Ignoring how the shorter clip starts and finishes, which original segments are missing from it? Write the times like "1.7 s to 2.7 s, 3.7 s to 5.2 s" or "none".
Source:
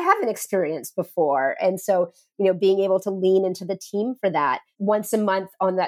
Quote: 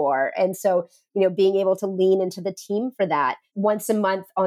none